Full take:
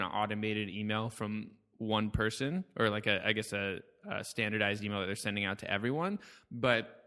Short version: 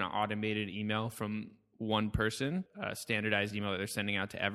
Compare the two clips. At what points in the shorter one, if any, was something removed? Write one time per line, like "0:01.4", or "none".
0:02.7